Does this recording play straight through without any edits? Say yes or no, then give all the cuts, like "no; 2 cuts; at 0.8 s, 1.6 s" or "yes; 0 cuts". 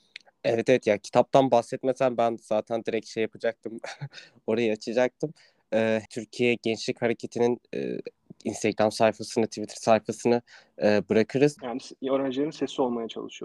no; 2 cuts; at 6.1 s, 11.6 s